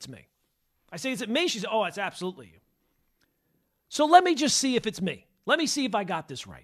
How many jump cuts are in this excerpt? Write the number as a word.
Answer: zero